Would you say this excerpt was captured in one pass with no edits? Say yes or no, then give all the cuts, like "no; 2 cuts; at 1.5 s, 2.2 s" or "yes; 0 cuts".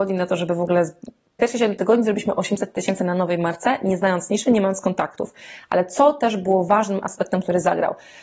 yes; 0 cuts